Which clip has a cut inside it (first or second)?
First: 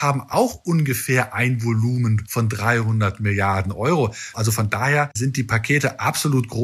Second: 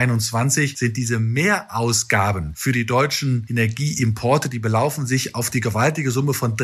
first